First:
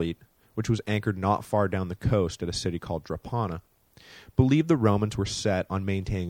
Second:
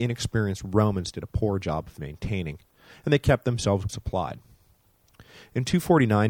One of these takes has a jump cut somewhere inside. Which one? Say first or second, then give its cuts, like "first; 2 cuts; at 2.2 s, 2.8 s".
second; 1 cut; at 3.9 s